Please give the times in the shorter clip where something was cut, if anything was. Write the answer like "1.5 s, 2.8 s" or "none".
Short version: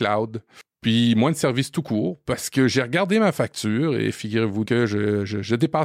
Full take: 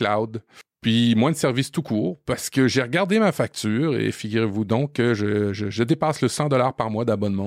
4.7 s